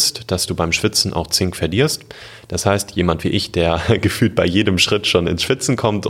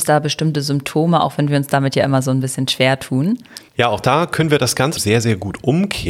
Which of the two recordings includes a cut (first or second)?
second